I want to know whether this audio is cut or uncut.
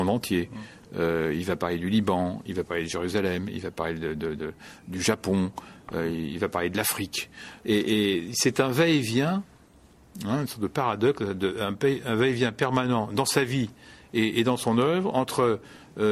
cut